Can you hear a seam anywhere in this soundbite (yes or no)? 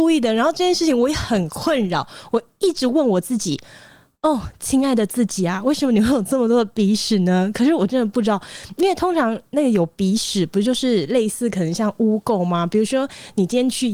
no